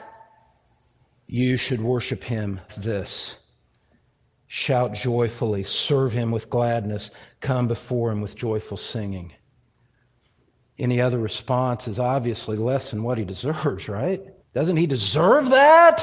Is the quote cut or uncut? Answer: cut